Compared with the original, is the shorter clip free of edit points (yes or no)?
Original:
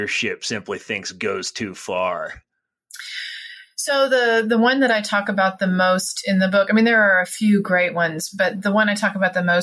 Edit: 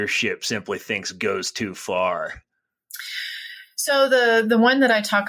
yes